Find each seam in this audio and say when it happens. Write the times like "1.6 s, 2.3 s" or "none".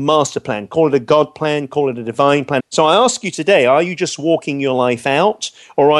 2.6 s

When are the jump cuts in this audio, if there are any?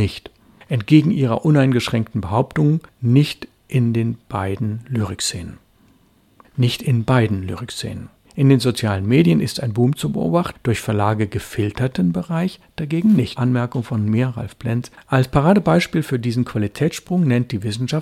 10.5 s, 13.4 s, 14.9 s

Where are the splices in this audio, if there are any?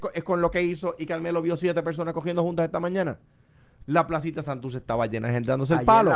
3.8 s

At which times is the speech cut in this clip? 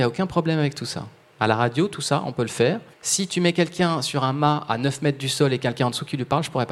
2.9 s

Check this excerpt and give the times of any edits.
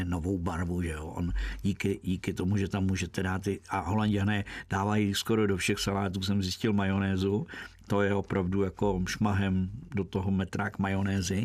none

